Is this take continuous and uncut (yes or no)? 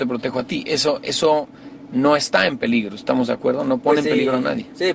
yes